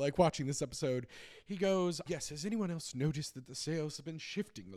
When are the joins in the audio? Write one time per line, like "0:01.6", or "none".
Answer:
0:02.1